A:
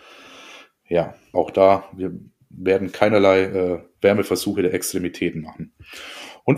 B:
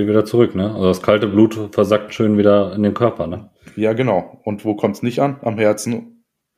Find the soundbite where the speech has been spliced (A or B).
A